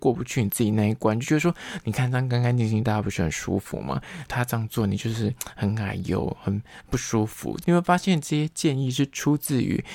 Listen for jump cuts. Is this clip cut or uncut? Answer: cut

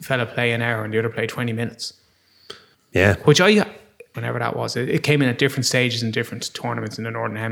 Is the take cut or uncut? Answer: cut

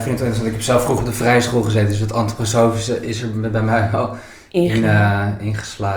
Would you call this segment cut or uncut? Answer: uncut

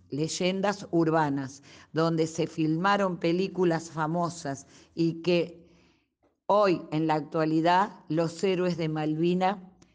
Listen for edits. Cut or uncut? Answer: uncut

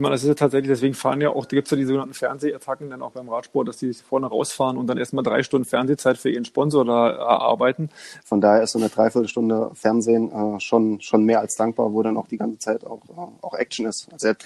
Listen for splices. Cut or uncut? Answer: cut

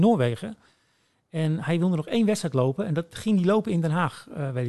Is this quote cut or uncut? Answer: uncut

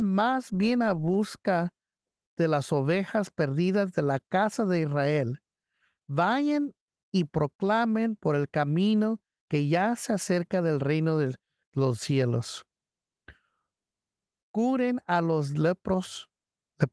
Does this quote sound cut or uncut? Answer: uncut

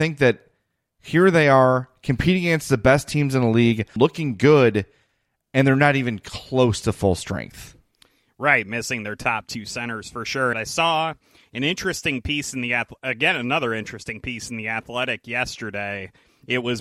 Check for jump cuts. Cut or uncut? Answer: cut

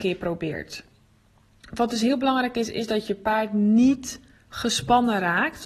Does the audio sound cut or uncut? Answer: uncut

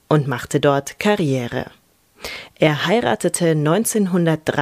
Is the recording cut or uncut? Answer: cut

